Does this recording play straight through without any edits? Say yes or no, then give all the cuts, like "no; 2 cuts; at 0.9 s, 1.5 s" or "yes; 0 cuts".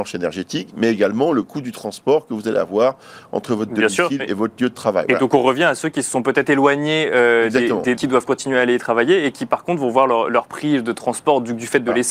no; 1 cut; at 8.0 s